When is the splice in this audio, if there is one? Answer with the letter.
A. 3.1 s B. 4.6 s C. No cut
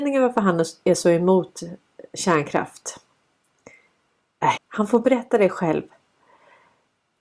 B